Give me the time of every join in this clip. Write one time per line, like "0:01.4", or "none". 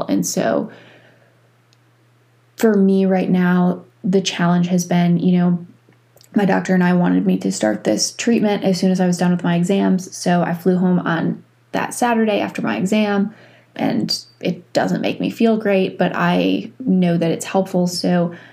0:13.7